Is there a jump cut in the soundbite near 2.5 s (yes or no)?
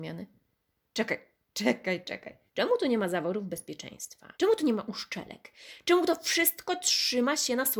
yes